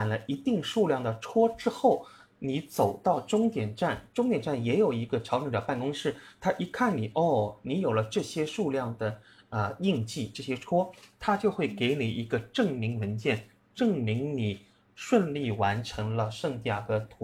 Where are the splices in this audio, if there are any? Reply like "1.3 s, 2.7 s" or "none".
none